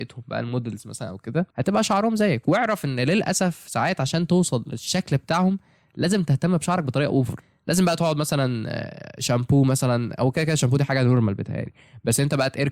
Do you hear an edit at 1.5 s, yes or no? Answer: yes